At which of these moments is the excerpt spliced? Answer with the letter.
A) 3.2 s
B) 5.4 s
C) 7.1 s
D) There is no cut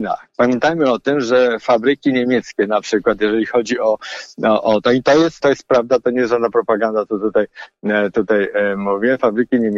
B